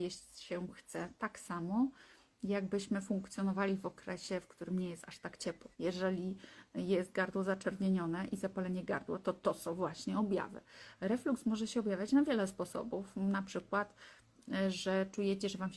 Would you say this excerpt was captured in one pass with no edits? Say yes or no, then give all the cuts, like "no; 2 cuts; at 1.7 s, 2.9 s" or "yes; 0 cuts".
no; 1 cut; at 5.7 s